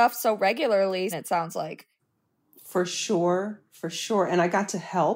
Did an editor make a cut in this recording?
yes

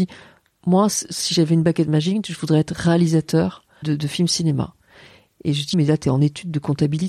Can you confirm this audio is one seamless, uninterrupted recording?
no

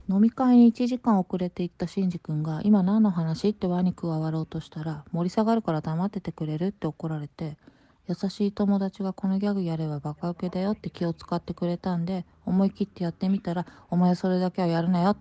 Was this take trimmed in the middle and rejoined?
no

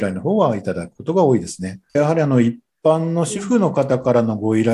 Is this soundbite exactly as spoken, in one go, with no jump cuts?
no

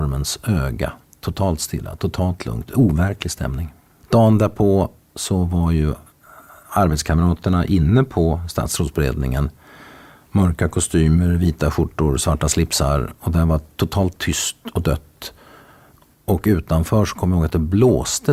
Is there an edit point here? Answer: yes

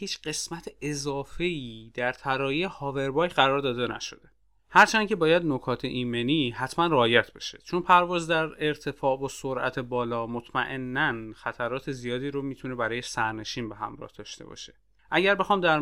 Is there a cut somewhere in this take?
no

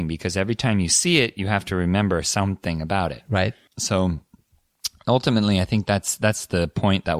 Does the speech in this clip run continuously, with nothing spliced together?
yes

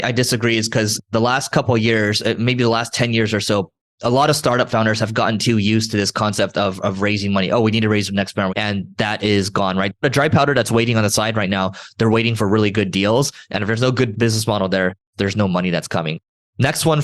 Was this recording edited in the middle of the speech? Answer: yes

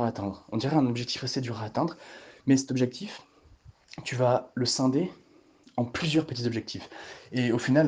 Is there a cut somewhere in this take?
no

